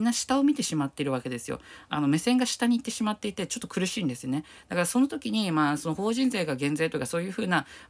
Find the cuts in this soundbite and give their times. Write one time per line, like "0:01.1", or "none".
none